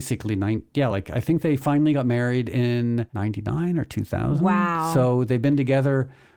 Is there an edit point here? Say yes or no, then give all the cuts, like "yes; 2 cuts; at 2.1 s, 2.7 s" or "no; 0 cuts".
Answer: no; 0 cuts